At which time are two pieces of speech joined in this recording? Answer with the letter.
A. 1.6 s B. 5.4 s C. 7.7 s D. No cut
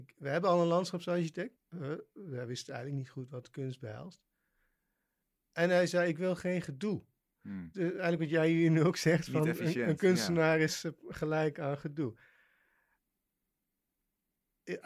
A